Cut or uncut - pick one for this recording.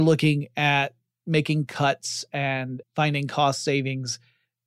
cut